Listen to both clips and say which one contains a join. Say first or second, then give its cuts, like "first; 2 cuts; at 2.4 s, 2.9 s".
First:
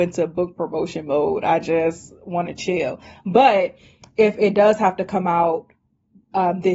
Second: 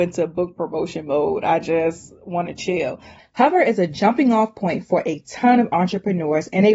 second; 1 cut; at 3.2 s